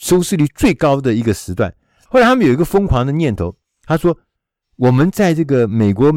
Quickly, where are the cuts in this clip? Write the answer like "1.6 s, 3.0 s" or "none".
2.1 s